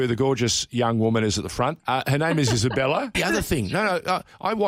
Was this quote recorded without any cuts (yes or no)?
no